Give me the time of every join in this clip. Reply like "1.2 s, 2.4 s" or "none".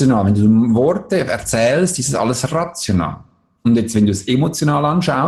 none